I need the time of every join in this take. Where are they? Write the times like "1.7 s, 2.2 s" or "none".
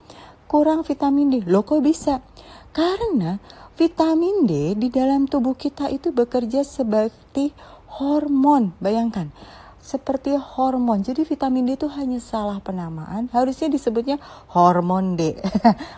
none